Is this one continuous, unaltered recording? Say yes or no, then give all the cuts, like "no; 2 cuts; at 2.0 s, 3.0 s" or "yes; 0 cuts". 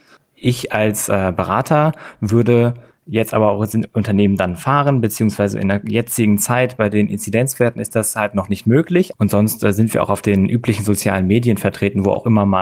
no; 1 cut; at 9.1 s